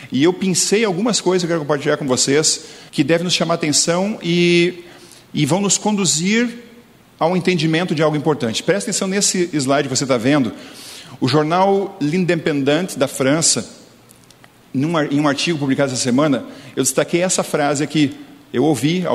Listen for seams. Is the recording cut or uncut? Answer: cut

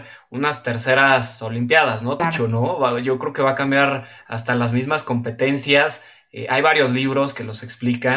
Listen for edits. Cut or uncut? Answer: cut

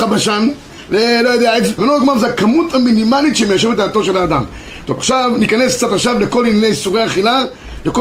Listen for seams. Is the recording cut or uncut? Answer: cut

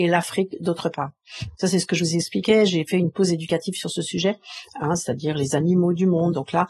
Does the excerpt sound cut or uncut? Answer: cut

